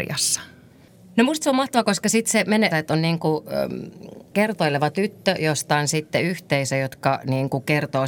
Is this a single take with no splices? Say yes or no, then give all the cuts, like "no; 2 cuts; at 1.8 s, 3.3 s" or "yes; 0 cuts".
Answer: no; 1 cut; at 2.7 s